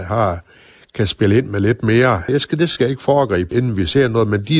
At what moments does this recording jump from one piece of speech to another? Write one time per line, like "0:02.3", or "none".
0:02.3
0:03.5